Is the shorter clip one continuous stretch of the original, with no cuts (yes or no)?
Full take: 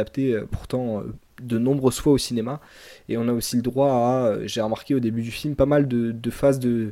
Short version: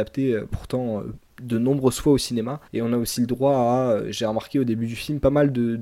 no